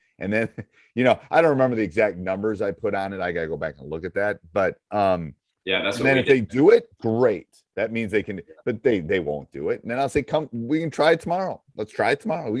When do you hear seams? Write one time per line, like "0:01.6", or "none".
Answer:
none

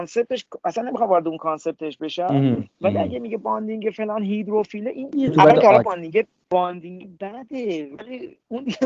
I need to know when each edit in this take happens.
0:05.3

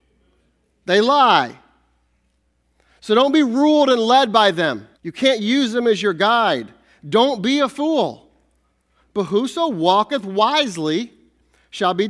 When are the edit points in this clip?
0:04.9
0:09.0

